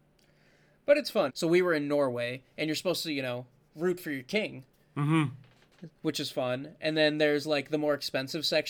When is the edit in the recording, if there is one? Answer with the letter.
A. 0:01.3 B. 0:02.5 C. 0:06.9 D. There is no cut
A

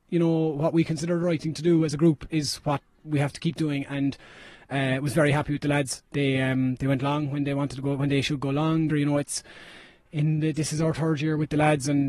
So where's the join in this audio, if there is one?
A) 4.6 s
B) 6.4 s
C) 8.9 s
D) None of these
C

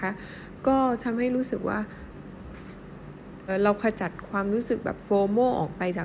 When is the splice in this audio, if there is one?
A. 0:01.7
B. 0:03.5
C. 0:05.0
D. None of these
B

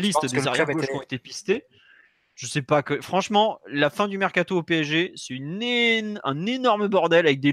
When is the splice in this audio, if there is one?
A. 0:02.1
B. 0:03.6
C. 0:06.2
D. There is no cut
D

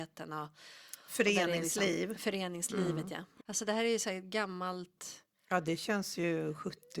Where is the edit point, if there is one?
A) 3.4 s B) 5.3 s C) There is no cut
A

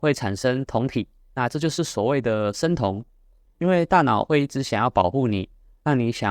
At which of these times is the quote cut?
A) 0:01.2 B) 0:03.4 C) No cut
B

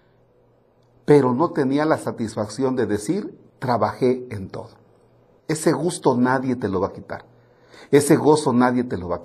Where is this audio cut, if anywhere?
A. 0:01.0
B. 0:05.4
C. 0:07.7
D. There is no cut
B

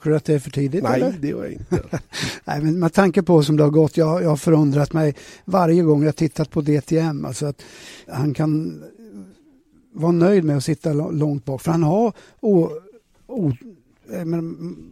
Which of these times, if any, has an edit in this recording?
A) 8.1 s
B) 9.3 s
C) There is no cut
A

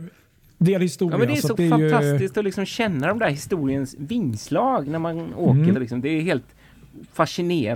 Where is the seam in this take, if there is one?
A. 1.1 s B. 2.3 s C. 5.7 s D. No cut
C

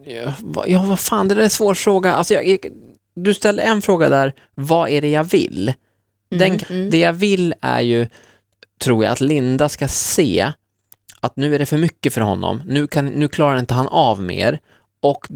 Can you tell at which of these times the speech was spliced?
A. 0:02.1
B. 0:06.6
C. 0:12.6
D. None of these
B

